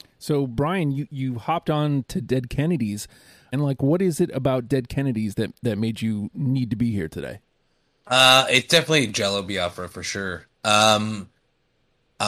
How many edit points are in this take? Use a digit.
1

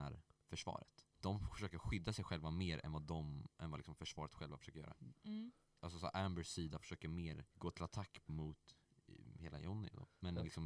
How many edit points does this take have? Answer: 2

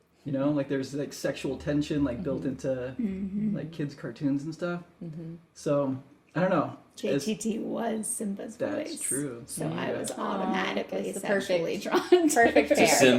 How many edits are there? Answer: 0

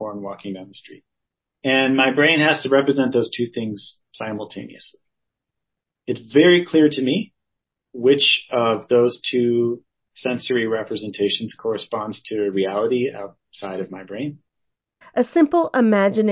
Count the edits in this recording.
1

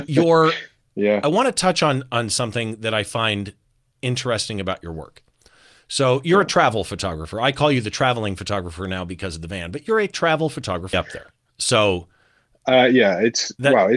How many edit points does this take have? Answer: 1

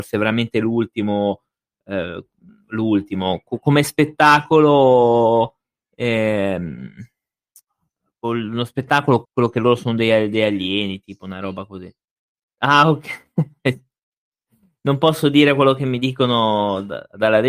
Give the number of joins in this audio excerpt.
1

